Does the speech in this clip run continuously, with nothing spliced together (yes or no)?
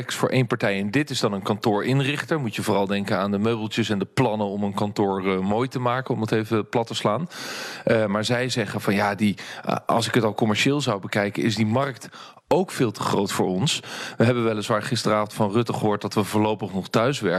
yes